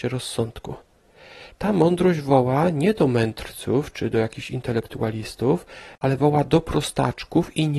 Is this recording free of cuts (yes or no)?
yes